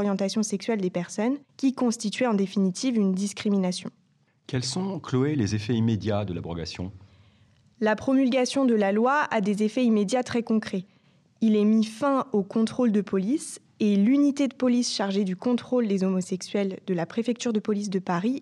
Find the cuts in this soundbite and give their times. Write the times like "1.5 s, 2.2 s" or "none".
none